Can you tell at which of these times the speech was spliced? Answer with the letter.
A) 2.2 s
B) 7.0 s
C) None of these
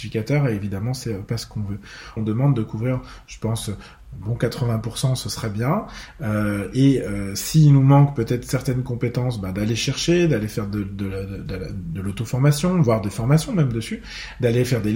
A